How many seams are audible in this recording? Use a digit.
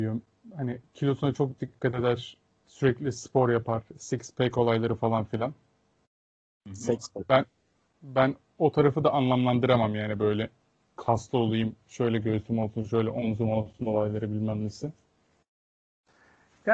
0